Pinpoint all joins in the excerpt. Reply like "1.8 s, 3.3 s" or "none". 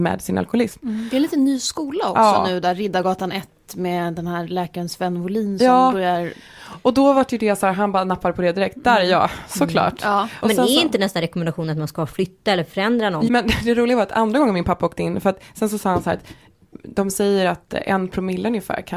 10.4 s, 13.3 s